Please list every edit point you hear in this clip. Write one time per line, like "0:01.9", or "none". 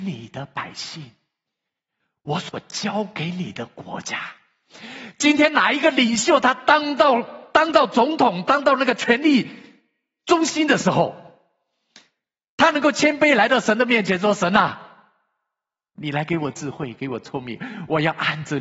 none